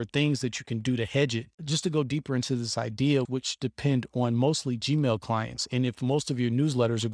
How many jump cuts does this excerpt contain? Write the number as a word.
two